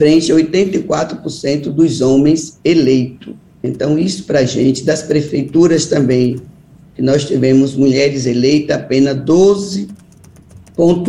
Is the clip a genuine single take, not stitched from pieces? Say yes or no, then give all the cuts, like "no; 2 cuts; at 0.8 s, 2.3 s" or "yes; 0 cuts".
yes; 0 cuts